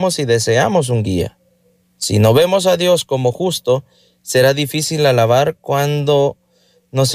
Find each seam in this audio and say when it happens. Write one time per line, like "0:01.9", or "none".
none